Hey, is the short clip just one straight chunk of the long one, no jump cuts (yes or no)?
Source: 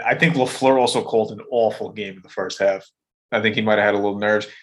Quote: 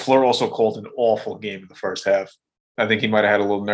yes